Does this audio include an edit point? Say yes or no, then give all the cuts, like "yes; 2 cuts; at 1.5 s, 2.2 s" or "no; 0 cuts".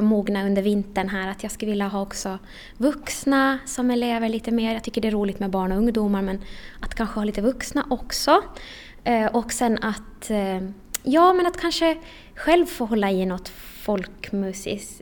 no; 0 cuts